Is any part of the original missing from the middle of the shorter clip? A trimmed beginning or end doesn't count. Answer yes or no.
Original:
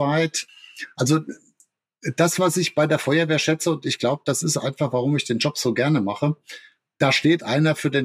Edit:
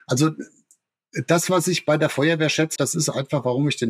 yes